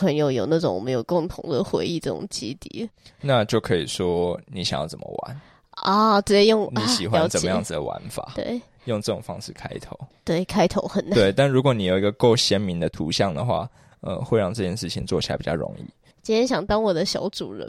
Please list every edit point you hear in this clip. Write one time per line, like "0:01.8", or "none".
0:10.1
0:16.1